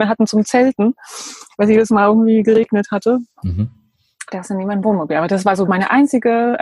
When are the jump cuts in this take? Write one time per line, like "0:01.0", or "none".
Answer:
none